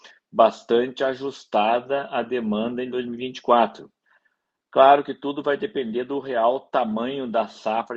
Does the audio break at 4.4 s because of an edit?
no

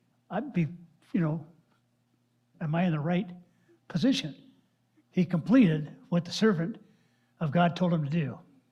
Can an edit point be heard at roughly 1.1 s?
no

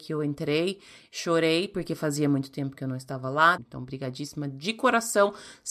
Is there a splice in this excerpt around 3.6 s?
yes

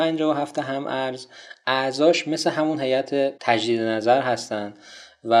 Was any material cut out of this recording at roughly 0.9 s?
no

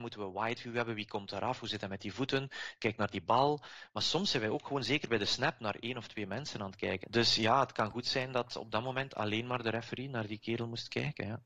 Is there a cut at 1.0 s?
no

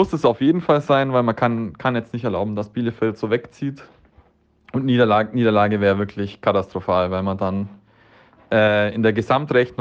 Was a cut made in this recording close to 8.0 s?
no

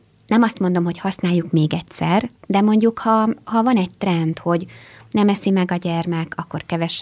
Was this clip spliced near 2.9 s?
no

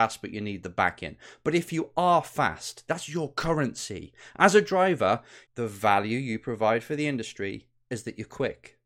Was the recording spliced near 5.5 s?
yes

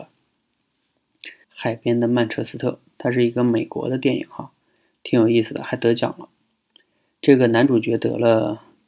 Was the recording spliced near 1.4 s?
yes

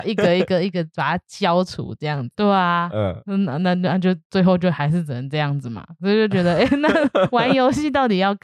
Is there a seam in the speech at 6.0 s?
no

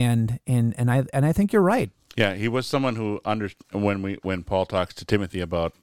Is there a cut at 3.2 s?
no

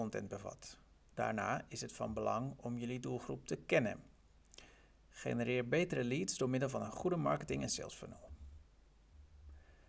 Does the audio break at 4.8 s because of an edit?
no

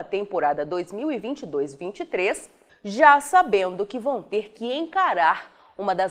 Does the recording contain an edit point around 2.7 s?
yes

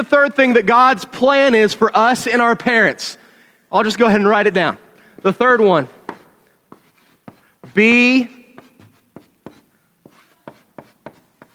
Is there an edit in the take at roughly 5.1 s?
no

